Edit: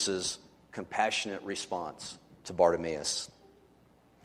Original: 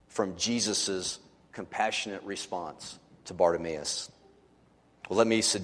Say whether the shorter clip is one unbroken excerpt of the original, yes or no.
yes